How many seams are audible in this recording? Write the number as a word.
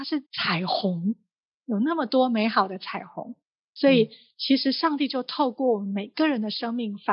zero